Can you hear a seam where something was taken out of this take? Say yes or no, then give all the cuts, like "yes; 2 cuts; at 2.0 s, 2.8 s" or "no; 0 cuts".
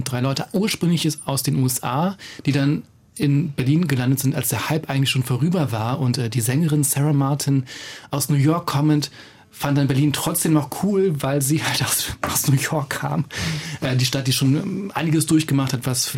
no; 0 cuts